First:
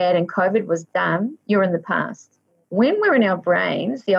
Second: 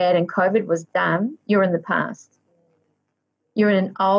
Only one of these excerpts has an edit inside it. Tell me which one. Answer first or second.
first